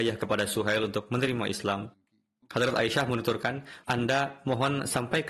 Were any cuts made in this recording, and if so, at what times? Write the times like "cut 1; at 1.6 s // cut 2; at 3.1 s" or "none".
cut 1; at 2.4 s // cut 2; at 3.8 s